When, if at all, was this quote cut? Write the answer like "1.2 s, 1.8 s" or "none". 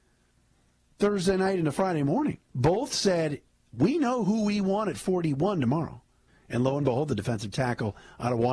2.4 s, 6.3 s